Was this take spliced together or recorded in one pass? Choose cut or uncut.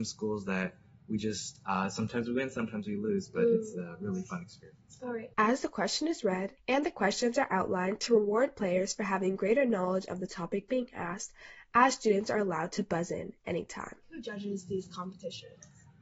cut